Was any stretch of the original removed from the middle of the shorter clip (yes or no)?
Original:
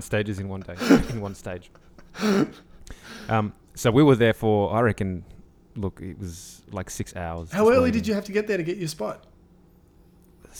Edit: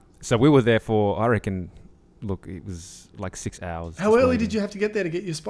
no